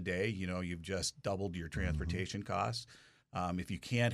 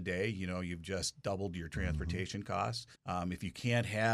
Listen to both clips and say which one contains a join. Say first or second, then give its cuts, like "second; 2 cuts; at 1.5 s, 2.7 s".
second; 1 cut; at 2.9 s